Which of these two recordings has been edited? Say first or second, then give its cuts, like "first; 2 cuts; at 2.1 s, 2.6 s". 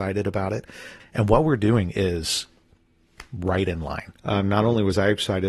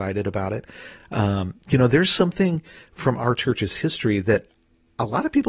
first; 2 cuts; at 1.0 s, 4.2 s